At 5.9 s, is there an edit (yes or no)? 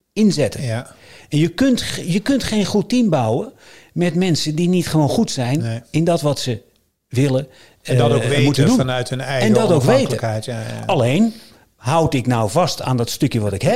no